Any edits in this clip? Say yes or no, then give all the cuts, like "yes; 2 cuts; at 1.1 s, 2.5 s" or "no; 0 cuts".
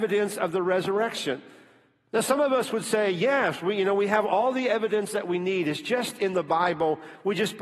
no; 0 cuts